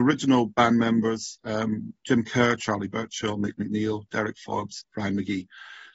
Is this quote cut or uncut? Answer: uncut